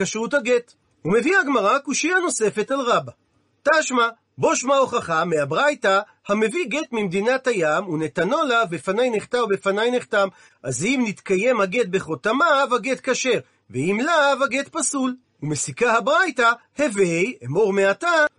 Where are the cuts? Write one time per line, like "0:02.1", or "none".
0:08.7